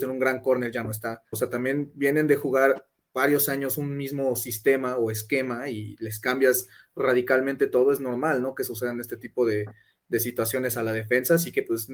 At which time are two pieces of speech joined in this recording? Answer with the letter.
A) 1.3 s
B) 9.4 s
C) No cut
A